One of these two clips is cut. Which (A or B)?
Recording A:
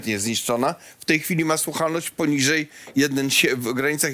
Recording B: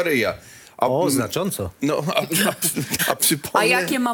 B